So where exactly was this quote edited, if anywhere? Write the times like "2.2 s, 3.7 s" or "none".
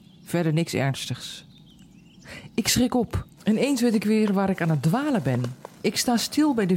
3.4 s, 5.7 s